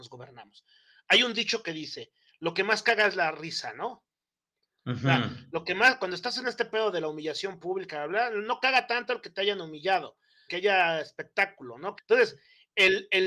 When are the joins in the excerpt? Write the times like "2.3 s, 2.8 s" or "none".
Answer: 10.5 s, 12.0 s